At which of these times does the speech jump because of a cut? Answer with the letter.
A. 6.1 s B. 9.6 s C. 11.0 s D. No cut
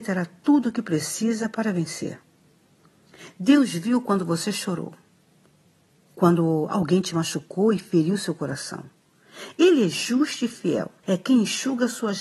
C